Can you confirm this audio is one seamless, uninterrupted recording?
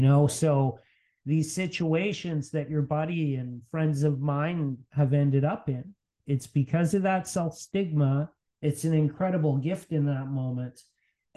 no; 2 cuts; at 6.2 s, 8.5 s

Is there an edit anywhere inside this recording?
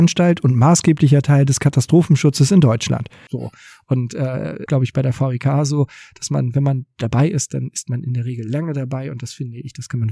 yes; 2 cuts; at 3.3 s, 4.7 s

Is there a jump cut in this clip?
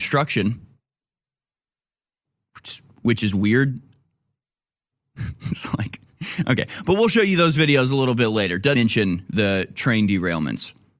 yes; 1 cut; at 8.8 s

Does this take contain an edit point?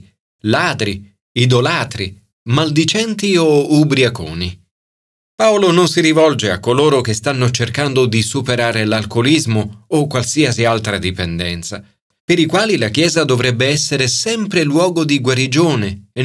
yes; 1 cut; at 5.2 s

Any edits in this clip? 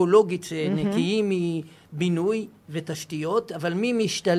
no; 0 cuts

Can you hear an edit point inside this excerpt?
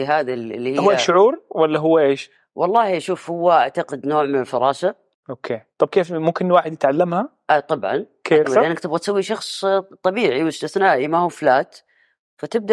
yes; 1 cut; at 8.4 s

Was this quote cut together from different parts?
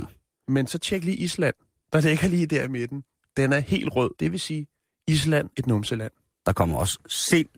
yes; 2 cuts; at 4.2 s, 5.5 s

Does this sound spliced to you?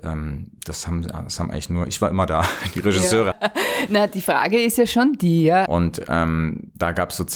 yes; 2 cuts; at 3.3 s, 5.7 s

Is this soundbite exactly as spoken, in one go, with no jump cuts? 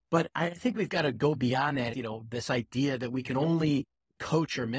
no; 1 cut; at 1.9 s

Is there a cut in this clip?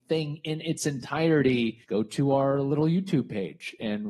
yes; 1 cut; at 1.8 s

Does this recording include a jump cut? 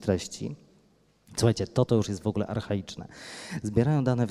no; 0 cuts

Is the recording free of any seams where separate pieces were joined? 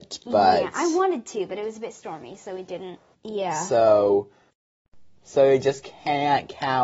no; 1 cut; at 3.1 s

